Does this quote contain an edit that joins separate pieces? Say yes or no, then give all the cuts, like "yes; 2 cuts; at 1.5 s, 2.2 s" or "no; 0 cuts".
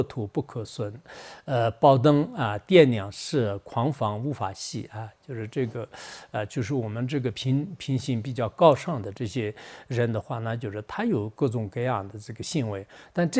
no; 0 cuts